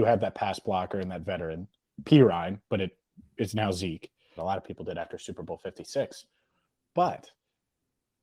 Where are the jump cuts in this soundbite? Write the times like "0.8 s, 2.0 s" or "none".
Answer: 4.4 s